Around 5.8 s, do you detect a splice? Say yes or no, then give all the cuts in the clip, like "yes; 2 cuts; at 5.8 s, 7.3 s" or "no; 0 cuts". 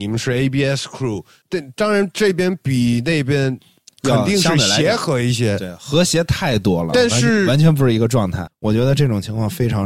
no; 2 cuts; at 1.4 s, 8.5 s